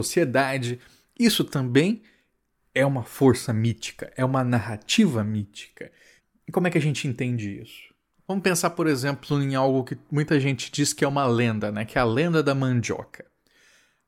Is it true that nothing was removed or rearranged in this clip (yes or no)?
yes